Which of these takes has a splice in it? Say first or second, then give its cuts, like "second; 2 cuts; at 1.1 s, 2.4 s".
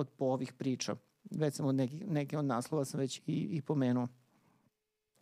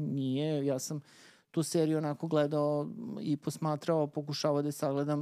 first; 1 cut; at 3.2 s